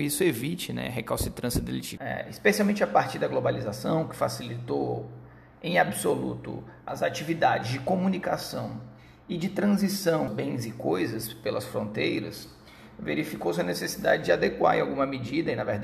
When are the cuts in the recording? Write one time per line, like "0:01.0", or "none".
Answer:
0:02.0
0:06.9
0:10.3

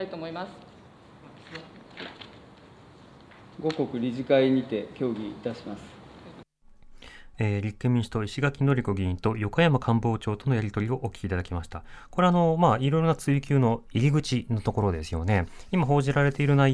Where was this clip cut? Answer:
none

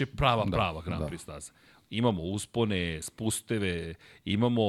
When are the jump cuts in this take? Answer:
none

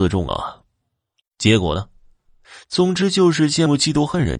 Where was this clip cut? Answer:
0:01.2
0:02.6

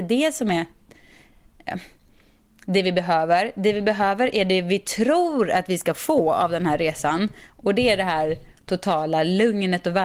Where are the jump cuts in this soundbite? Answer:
none

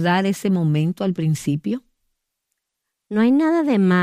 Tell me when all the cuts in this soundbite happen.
none

